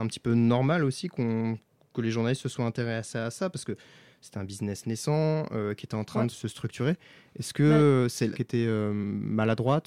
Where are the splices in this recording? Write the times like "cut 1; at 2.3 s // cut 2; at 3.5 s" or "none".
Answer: cut 1; at 6.3 s // cut 2; at 8.3 s